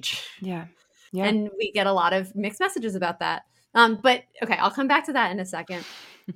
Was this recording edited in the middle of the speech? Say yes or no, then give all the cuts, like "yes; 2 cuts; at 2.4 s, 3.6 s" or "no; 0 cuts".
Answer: no; 0 cuts